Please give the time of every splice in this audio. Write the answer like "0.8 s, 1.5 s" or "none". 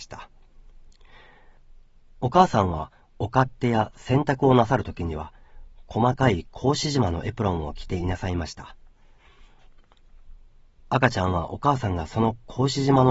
none